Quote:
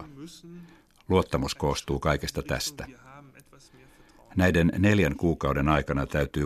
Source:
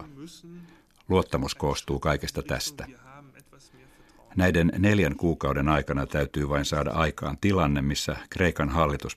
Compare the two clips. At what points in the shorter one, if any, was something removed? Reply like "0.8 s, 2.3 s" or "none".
none